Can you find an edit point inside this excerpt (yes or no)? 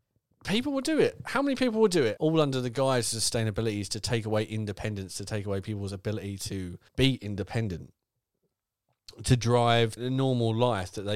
yes